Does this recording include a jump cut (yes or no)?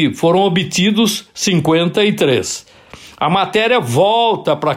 no